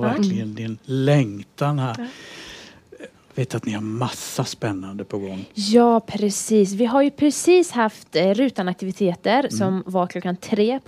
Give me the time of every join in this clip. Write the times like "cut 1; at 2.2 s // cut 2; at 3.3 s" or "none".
cut 1; at 3.3 s